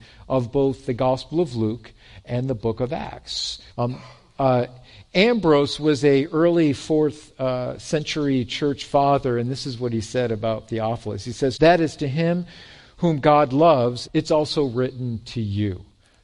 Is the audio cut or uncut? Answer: cut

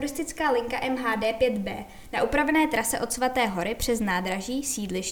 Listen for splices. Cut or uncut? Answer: uncut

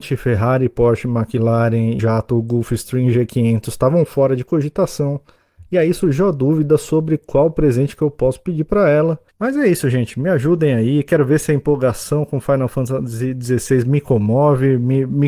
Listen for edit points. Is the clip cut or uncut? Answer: cut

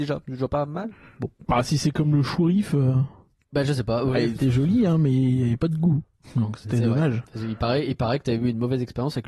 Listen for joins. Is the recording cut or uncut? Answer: uncut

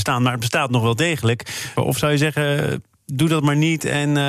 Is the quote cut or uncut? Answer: cut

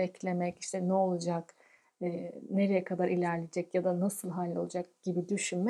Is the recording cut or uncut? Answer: uncut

